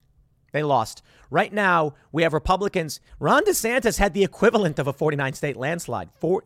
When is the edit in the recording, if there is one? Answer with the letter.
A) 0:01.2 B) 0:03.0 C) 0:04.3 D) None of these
B